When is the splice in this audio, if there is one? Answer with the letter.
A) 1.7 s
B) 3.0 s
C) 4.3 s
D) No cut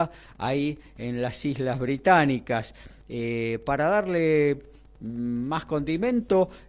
D